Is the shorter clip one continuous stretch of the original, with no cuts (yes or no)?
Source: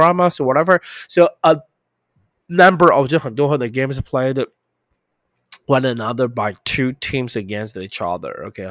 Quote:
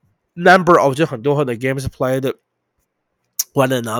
yes